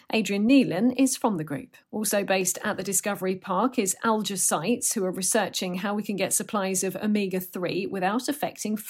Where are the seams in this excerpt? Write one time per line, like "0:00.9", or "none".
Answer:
0:01.8